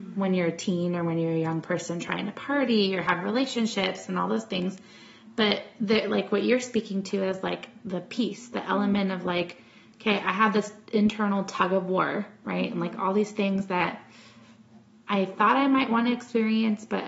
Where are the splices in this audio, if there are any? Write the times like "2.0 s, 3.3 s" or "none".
none

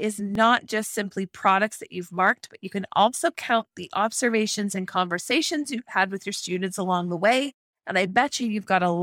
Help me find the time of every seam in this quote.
none

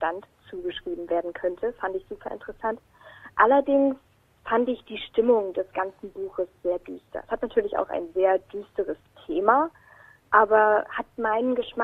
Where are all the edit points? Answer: none

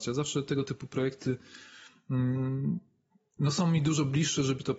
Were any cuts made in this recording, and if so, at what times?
none

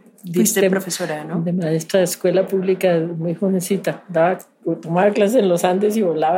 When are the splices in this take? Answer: none

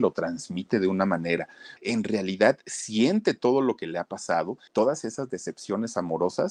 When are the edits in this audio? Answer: 1.8 s, 4.7 s

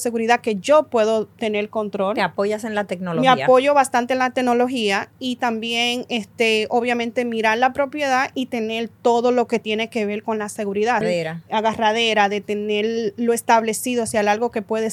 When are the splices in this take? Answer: 11.0 s

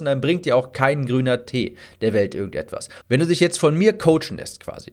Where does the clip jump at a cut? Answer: 3.0 s

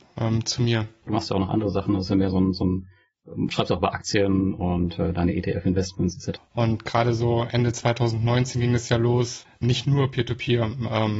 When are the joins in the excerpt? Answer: 1.1 s, 6.4 s, 9.6 s

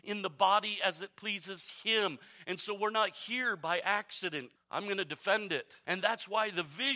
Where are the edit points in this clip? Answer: 4.6 s, 5.8 s

